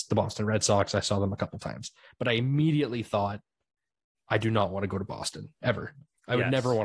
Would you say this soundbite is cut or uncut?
uncut